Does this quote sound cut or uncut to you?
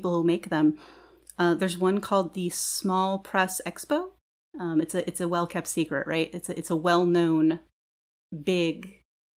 uncut